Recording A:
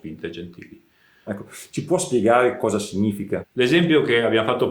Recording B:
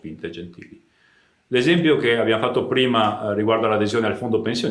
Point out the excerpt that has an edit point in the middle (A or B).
A